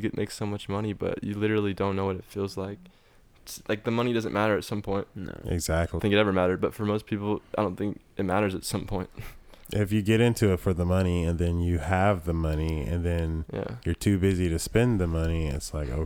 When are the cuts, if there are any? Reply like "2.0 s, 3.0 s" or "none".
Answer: 6.0 s